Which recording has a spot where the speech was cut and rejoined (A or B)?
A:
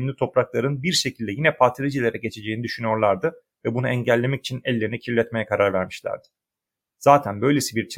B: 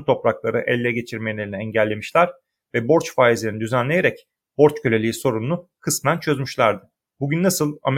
B